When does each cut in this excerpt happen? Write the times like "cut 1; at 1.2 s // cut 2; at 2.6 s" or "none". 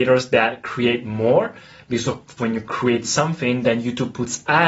cut 1; at 2.4 s